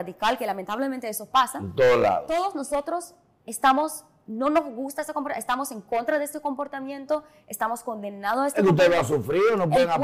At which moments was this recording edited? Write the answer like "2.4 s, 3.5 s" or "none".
none

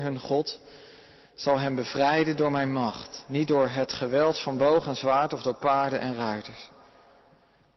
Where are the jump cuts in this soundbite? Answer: none

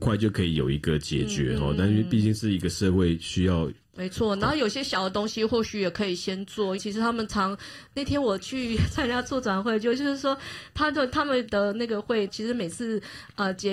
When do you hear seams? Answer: 4.0 s, 6.8 s, 12.3 s

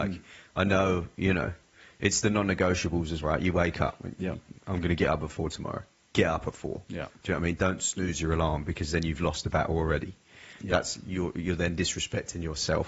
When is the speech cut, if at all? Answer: 3.2 s

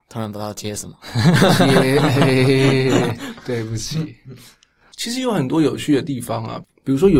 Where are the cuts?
none

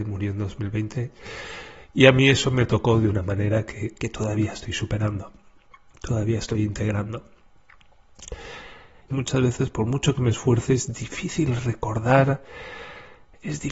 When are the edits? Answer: 9.1 s

